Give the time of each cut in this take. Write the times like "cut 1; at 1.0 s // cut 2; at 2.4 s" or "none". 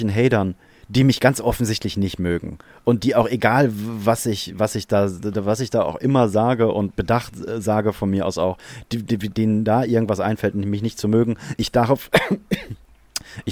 none